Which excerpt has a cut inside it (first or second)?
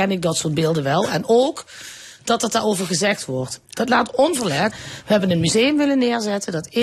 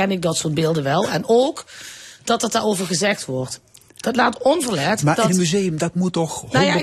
first